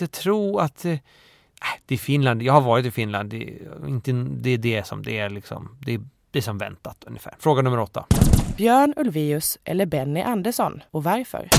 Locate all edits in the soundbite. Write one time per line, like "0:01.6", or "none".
0:07.4